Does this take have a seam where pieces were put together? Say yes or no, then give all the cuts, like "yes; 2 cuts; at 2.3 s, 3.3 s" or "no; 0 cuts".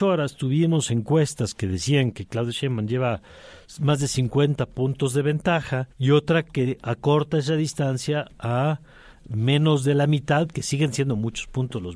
yes; 1 cut; at 5.9 s